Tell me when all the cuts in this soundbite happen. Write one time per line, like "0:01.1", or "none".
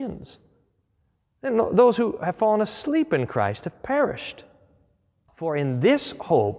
0:05.3